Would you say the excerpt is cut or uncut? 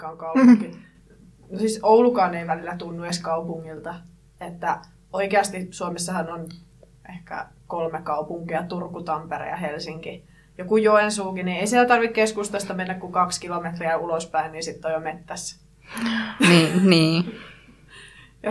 uncut